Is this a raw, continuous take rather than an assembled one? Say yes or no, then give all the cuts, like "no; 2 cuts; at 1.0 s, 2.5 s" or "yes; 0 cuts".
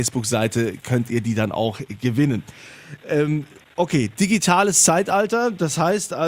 yes; 0 cuts